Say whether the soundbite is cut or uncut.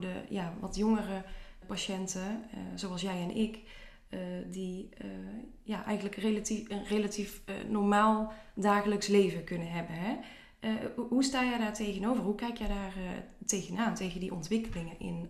cut